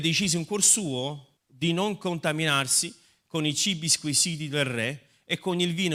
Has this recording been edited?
yes; 1 cut; at 1.4 s

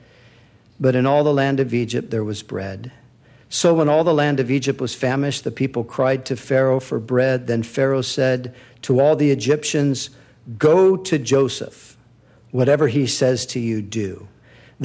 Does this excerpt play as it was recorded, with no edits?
yes; 0 cuts

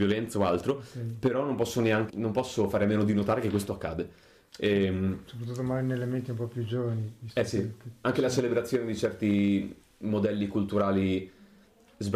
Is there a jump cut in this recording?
yes; 1 cut; at 2.1 s

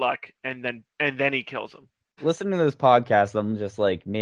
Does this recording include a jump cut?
yes; 1 cut; at 2.2 s

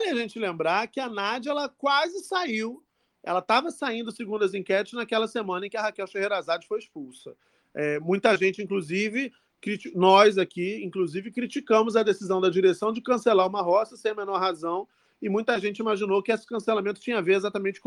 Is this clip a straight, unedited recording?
yes; 0 cuts

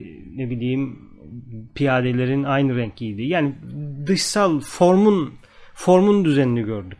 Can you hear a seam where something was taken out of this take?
no; 0 cuts

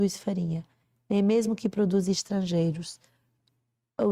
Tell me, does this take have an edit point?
no; 0 cuts

